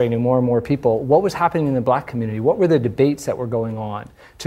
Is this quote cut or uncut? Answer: uncut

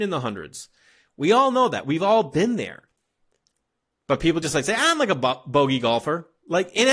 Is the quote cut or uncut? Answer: uncut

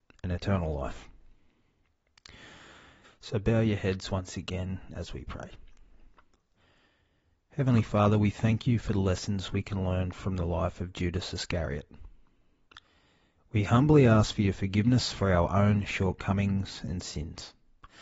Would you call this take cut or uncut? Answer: cut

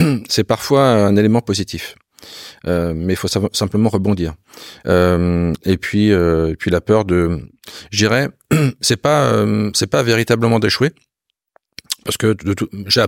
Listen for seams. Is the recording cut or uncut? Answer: cut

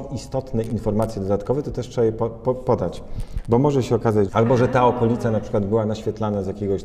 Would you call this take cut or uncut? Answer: cut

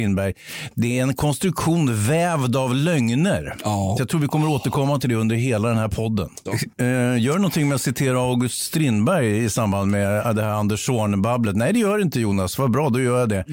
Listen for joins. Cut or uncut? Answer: cut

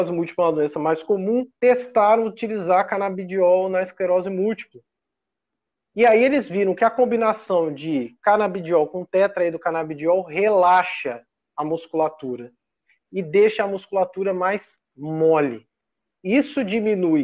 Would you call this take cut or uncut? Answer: cut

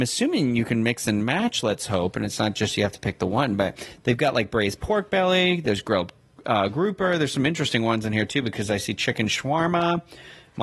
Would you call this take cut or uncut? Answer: uncut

